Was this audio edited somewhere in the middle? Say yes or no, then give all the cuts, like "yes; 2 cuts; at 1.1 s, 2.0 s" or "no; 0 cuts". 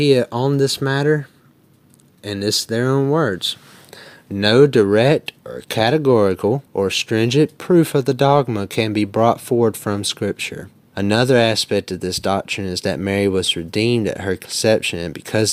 yes; 2 cuts; at 6.7 s, 10.9 s